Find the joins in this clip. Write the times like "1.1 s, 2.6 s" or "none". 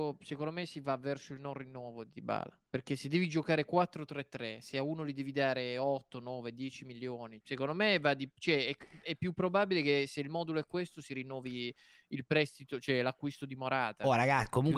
7.4 s